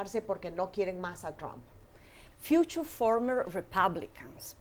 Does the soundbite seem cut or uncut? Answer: cut